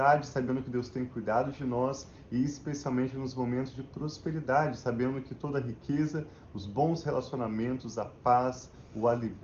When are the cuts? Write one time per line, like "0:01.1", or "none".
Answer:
none